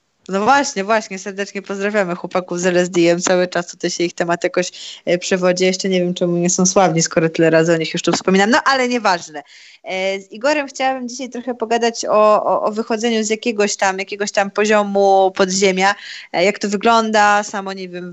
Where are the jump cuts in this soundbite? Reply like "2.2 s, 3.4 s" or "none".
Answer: none